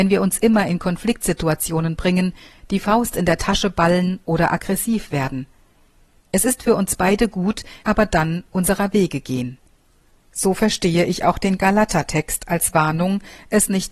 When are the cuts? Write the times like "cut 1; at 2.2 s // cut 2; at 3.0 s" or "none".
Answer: cut 1; at 7.8 s